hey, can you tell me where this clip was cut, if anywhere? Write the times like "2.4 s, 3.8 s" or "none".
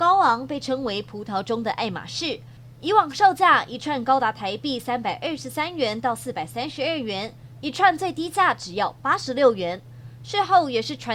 7.6 s, 10.2 s

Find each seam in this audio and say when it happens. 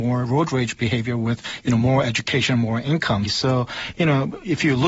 3.2 s

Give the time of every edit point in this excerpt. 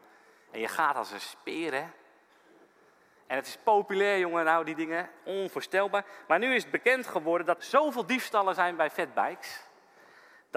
7.6 s

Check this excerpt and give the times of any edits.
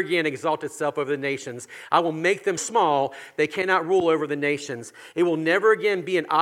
2.6 s

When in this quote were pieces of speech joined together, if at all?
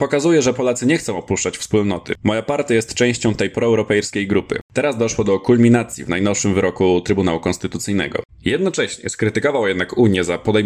4.6 s, 8.3 s

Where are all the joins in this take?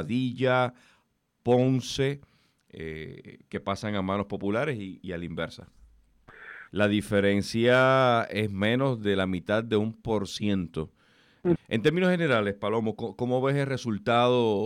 5.0 s, 6.7 s, 11.6 s

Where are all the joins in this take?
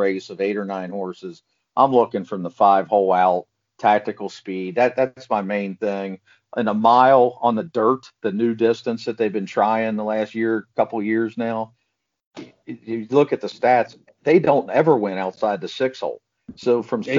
none

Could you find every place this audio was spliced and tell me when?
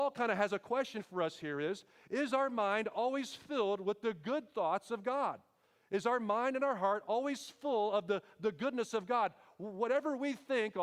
none

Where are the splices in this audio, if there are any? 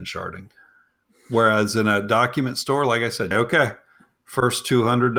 3.3 s

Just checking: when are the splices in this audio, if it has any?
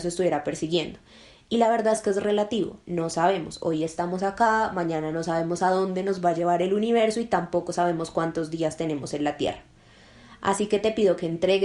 none

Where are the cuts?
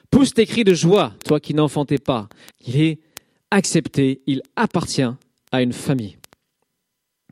1.2 s, 2.5 s

